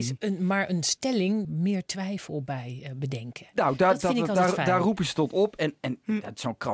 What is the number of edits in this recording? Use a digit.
1